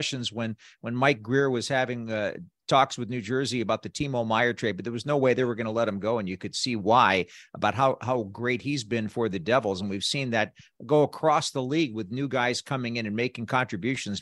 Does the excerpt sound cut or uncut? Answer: uncut